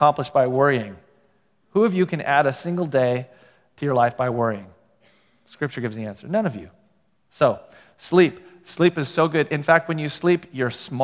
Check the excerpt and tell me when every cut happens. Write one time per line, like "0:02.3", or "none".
none